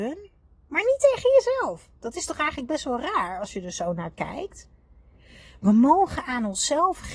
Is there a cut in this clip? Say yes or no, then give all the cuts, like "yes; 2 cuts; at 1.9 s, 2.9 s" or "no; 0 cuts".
no; 0 cuts